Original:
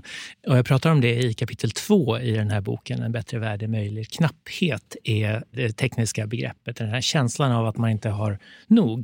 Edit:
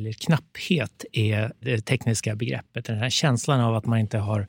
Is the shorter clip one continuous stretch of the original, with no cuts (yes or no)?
yes